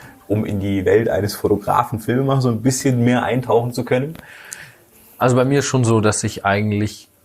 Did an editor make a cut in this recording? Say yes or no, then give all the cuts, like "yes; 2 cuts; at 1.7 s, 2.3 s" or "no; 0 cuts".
no; 0 cuts